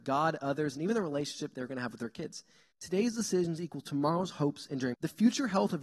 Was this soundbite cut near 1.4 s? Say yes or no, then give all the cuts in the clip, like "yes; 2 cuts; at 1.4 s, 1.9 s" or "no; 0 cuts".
no; 2 cuts; at 2.7 s, 4.9 s